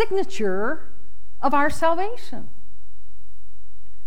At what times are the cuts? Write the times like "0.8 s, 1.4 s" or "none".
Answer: none

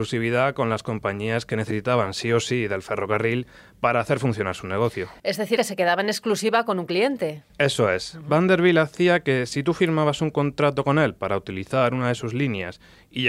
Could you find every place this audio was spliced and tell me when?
5.6 s

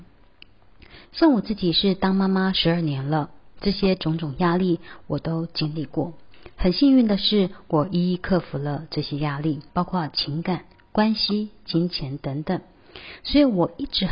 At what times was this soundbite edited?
9.7 s

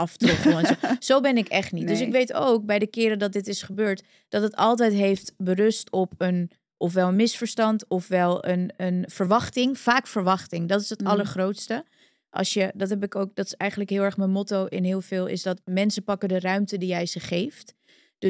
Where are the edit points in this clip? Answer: none

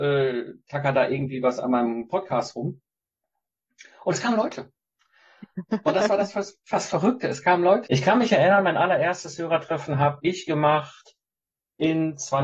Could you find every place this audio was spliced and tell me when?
7.9 s

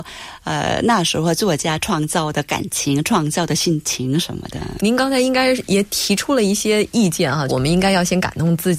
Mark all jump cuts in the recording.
4.8 s, 7.5 s

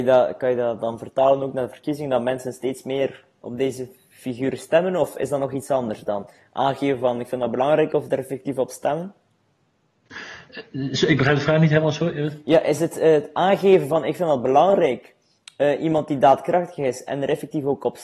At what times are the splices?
none

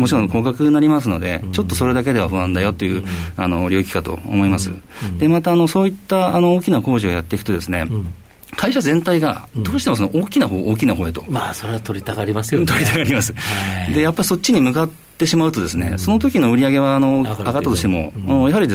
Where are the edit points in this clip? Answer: none

